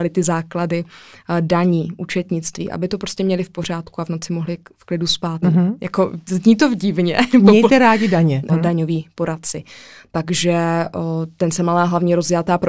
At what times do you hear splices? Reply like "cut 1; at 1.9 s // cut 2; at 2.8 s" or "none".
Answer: cut 1; at 5.4 s // cut 2; at 8.5 s